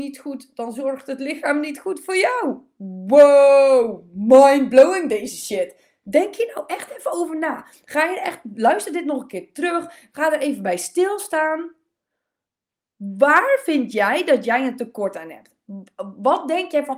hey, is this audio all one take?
yes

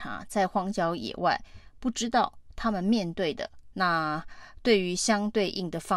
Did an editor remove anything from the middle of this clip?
yes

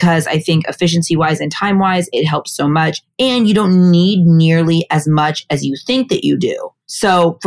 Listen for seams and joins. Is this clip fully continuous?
yes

